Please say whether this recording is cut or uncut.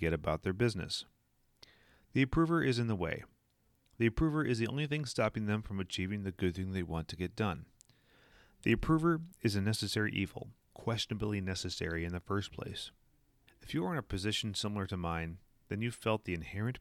cut